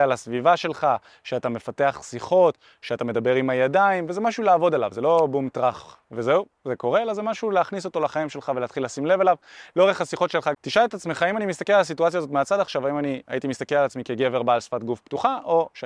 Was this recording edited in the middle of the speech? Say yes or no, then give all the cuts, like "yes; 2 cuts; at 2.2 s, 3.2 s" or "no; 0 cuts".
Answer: yes; 1 cut; at 10.5 s